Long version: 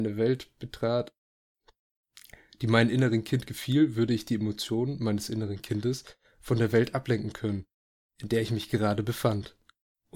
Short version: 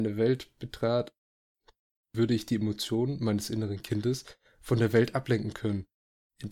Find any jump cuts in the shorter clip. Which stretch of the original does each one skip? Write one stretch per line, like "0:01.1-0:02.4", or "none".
0:02.1-0:03.9